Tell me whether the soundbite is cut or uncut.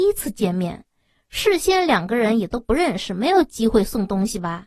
uncut